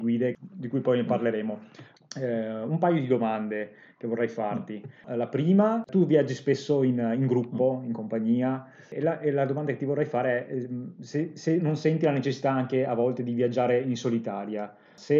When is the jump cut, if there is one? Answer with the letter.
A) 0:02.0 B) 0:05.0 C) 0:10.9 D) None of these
A